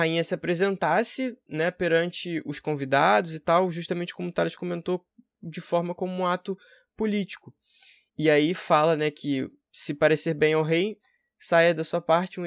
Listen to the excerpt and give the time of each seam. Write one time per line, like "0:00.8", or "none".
0:08.1